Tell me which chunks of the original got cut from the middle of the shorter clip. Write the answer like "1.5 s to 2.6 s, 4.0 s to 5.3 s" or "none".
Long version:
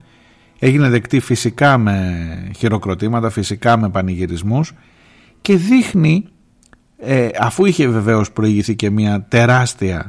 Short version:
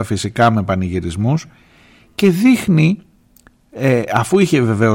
none